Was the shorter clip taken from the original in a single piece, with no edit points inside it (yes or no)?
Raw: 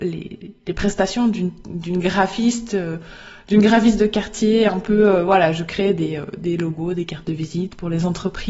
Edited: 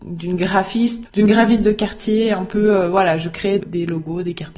no